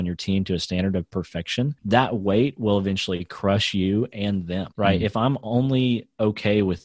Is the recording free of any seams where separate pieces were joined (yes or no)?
yes